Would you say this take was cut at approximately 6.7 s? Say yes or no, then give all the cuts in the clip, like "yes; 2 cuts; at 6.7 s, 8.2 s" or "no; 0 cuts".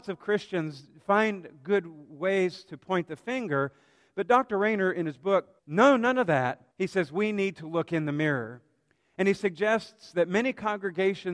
yes; 2 cuts; at 5.6 s, 6.7 s